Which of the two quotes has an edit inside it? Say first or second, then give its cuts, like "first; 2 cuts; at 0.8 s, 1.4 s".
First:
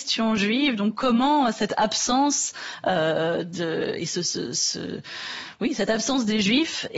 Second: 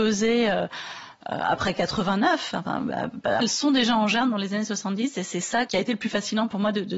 second; 2 cuts; at 3.4 s, 5.7 s